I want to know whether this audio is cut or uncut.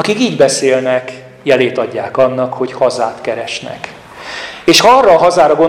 uncut